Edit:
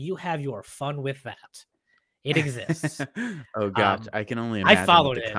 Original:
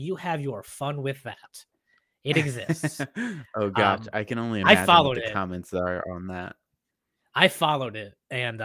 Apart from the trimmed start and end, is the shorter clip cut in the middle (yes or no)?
no